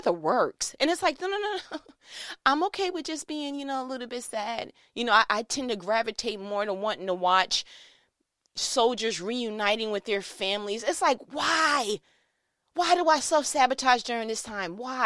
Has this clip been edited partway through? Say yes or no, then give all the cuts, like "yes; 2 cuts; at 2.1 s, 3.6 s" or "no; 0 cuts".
no; 0 cuts